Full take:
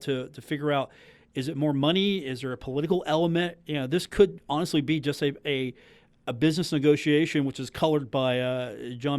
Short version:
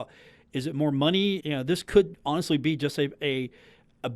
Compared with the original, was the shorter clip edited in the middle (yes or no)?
yes